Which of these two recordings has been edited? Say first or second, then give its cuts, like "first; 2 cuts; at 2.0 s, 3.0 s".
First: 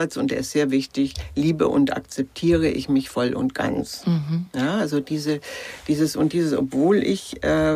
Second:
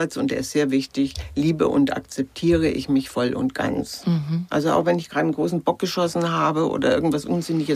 second; 1 cut; at 4.5 s